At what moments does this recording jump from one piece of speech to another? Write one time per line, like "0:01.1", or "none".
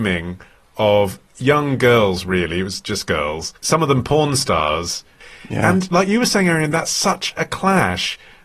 0:03.6